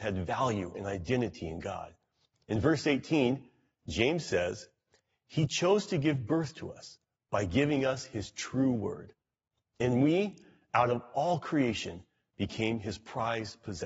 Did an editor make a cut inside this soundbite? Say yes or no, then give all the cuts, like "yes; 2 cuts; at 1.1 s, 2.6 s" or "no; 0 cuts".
no; 0 cuts